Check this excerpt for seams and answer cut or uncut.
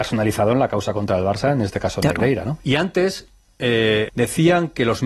cut